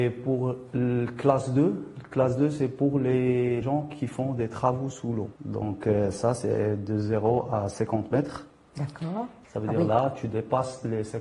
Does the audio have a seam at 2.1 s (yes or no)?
no